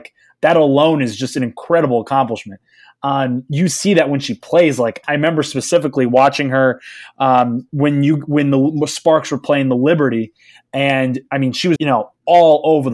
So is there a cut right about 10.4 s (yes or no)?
no